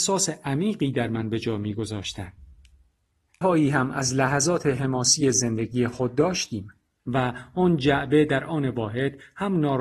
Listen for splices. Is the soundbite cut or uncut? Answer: cut